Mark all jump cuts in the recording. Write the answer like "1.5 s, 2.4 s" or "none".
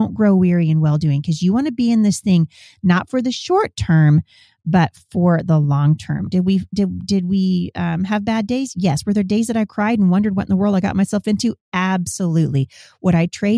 6.3 s